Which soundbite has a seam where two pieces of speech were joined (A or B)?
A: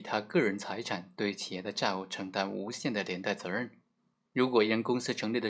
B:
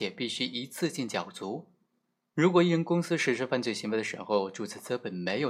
A